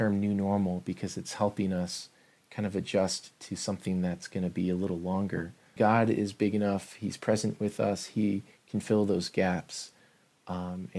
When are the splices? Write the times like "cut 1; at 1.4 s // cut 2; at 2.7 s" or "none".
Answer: cut 1; at 5.8 s